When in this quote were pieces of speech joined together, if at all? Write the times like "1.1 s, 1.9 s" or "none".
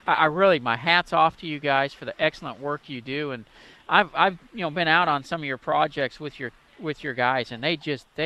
none